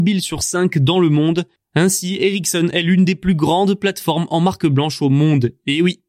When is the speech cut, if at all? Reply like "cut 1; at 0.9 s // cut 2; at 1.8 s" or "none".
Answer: cut 1; at 1.6 s